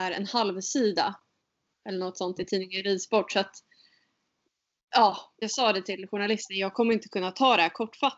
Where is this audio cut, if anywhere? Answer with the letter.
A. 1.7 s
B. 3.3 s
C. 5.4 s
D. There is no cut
C